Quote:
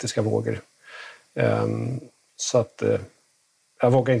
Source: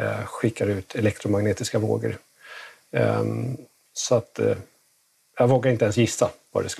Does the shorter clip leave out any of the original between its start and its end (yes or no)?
no